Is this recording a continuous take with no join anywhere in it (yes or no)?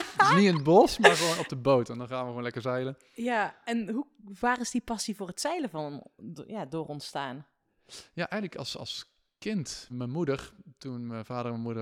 no